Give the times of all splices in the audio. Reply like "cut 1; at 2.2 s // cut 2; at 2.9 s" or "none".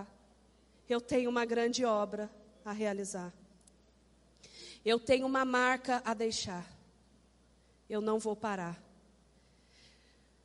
none